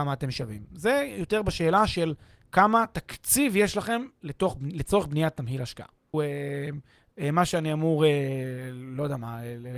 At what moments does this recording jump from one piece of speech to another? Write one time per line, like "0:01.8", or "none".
0:06.1